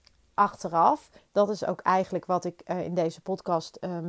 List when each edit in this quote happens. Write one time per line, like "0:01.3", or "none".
0:01.2